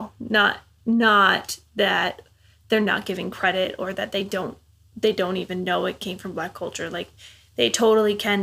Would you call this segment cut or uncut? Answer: uncut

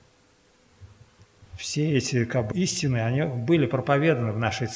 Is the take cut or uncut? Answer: cut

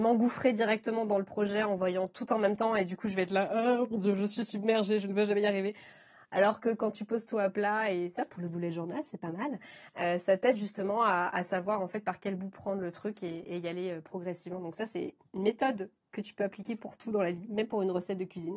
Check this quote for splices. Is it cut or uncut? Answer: uncut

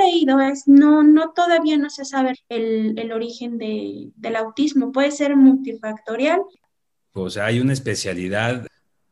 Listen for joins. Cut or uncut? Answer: cut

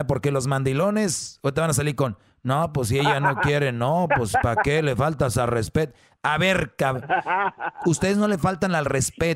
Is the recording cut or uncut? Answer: uncut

